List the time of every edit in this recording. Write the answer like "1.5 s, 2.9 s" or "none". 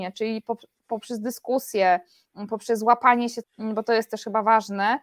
3.4 s